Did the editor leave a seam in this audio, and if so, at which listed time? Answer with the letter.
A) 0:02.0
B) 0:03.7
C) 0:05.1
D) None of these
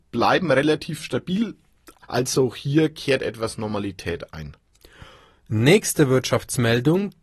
A